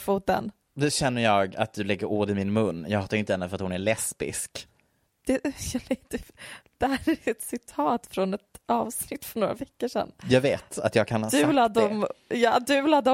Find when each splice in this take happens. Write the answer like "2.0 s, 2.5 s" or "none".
none